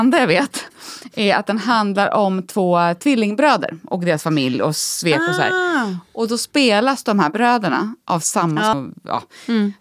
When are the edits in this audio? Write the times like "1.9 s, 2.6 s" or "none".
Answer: 8.7 s